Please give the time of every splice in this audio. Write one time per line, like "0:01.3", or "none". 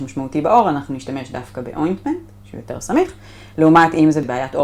none